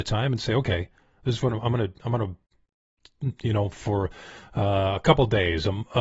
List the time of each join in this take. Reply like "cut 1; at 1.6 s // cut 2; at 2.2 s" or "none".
none